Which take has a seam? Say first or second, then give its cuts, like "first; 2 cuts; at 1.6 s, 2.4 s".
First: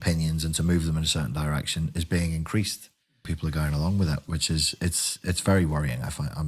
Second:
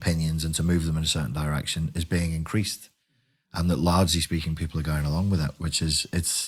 first; 1 cut; at 3.2 s